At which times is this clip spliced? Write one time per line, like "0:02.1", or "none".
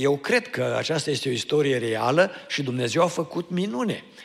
none